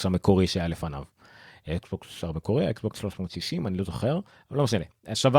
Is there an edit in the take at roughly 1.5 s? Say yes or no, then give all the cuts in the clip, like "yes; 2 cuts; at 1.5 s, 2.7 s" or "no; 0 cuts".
no; 0 cuts